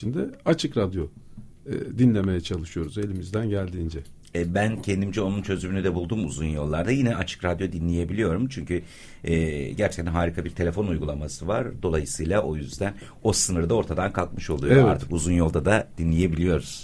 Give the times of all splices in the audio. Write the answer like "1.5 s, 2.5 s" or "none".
none